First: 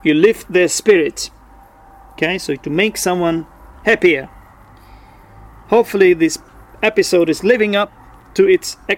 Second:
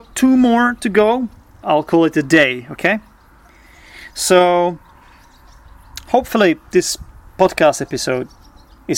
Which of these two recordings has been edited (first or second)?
second